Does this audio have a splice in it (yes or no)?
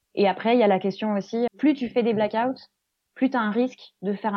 yes